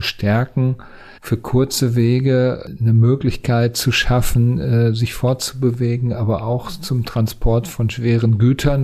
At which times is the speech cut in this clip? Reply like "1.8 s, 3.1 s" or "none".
1.2 s